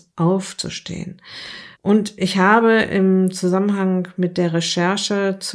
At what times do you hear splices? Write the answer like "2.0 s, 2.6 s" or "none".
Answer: 1.7 s